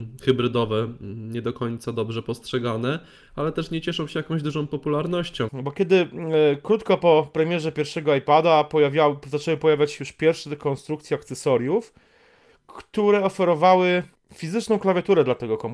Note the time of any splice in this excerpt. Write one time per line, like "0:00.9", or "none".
0:05.5